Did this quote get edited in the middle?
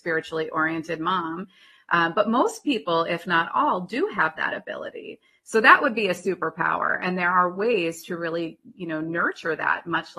no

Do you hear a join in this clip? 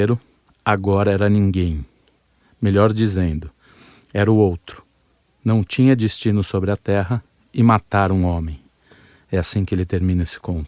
no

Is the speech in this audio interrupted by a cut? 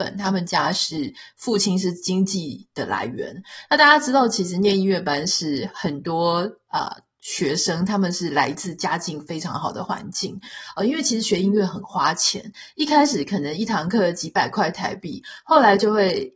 no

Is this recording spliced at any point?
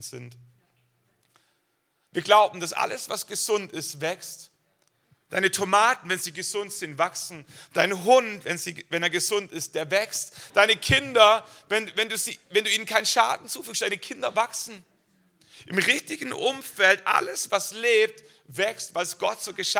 yes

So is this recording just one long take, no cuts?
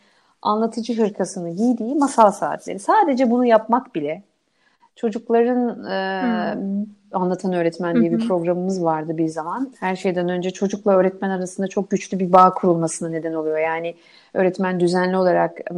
no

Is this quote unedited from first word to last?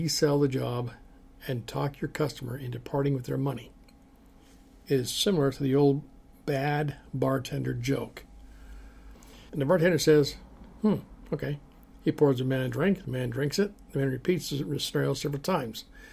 no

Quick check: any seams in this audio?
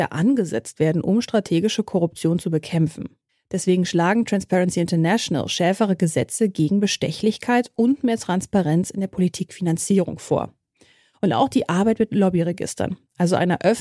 no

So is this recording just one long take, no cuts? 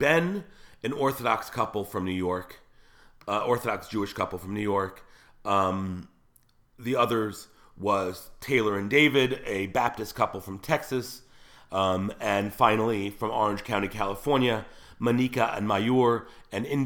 yes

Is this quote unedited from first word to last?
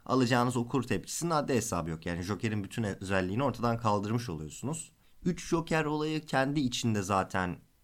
no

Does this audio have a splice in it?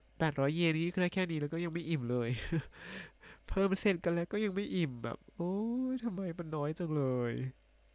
no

